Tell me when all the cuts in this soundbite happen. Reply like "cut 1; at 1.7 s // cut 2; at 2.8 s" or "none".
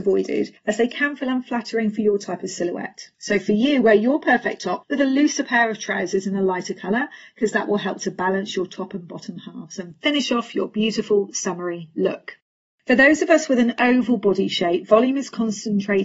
none